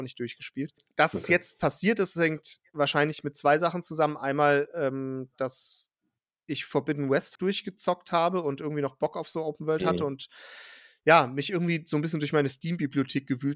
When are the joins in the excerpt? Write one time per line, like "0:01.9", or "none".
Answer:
0:07.4